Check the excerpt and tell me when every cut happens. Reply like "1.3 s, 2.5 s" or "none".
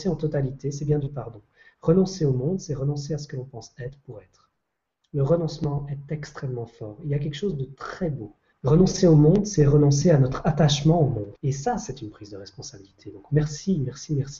8.5 s, 11.4 s